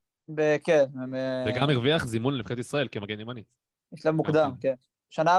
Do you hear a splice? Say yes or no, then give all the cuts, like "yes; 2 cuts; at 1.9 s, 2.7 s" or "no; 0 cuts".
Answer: no; 0 cuts